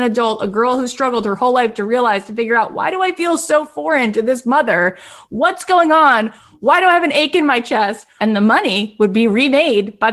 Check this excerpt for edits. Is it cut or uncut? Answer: cut